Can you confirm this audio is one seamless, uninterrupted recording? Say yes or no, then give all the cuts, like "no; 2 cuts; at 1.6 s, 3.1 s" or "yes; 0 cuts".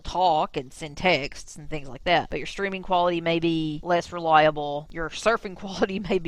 yes; 0 cuts